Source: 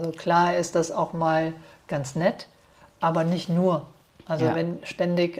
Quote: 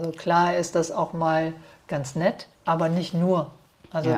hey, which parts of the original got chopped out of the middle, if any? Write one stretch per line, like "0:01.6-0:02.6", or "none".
0:02.5-0:02.9